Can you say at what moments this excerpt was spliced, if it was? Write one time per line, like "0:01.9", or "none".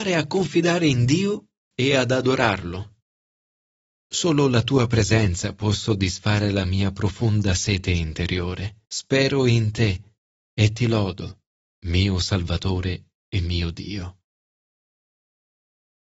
0:03.9
0:08.8